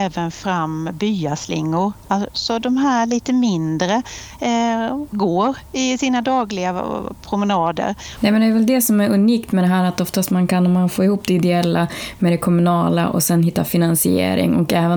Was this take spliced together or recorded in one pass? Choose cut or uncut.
cut